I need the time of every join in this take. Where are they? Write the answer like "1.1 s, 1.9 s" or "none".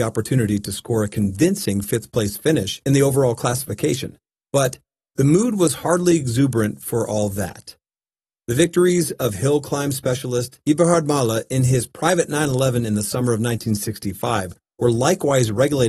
8.3 s